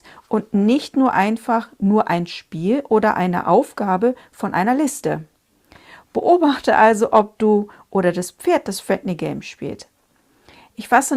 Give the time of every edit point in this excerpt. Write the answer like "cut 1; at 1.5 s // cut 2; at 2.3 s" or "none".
none